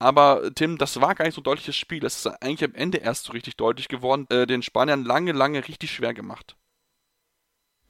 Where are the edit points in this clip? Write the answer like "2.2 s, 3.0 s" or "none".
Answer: 4.3 s